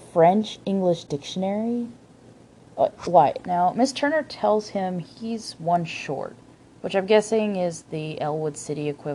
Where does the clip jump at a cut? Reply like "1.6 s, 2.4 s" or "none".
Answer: 3.4 s, 6.7 s

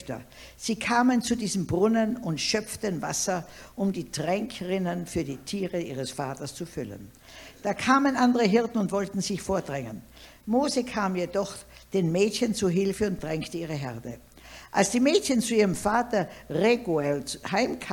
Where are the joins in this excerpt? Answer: none

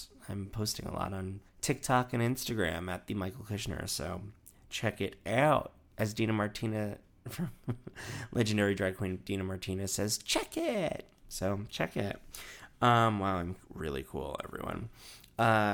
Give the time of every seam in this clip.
1.5 s

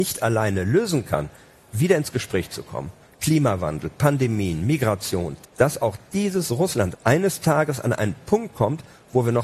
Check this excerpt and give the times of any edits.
5.4 s, 6.9 s

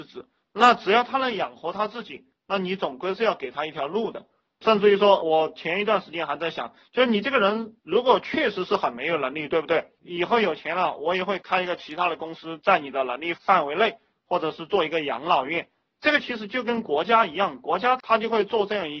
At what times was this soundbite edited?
none

